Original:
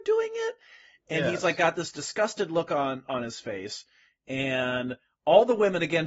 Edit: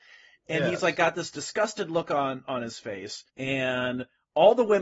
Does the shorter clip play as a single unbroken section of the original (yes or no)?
no